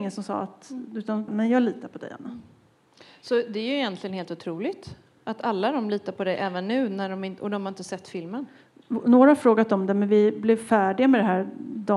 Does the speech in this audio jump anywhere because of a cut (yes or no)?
yes